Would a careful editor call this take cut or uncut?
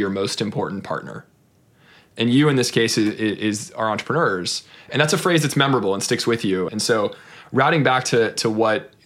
cut